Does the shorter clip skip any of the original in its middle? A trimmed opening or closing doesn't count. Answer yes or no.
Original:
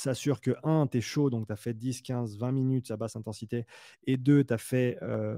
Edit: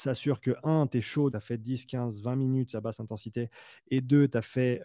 yes